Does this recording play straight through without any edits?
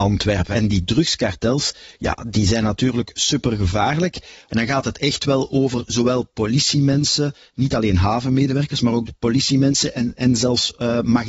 no; 1 cut; at 4.5 s

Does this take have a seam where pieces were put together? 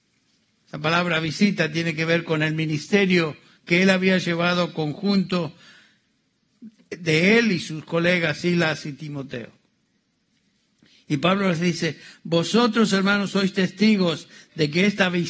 no; 0 cuts

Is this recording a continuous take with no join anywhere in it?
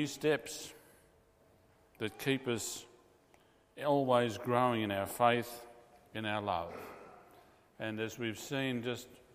yes; 0 cuts

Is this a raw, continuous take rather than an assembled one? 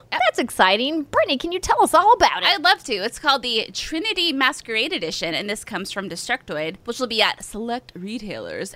yes; 0 cuts

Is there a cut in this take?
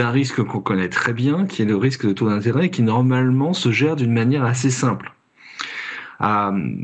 no; 0 cuts

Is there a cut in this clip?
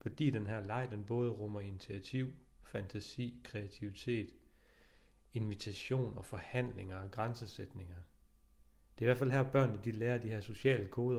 no; 0 cuts

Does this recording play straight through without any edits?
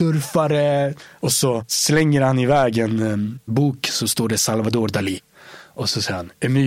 yes; 0 cuts

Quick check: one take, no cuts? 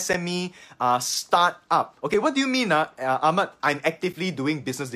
no; 1 cut; at 3.6 s

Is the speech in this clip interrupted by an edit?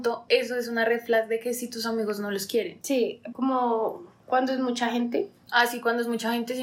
yes; 1 cut; at 3.3 s

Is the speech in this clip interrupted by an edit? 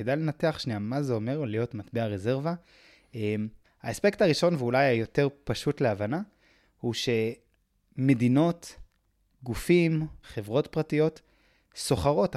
yes; 2 cuts; at 3.6 s, 10.2 s

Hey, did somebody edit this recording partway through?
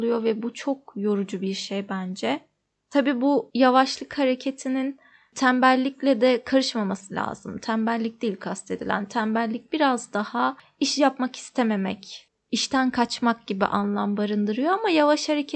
no; 0 cuts

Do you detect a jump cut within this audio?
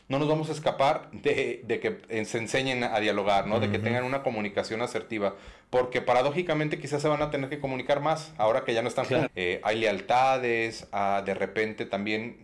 yes; 1 cut; at 9.3 s

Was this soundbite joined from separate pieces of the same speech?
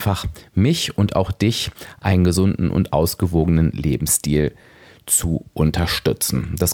no; 0 cuts

